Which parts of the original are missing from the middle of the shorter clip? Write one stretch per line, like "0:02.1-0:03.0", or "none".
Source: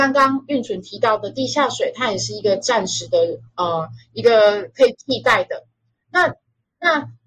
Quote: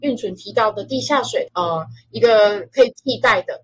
0:01.9-0:03.5